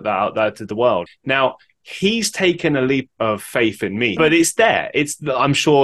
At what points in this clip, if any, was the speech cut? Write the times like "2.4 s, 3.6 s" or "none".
1.1 s, 3.1 s, 4.2 s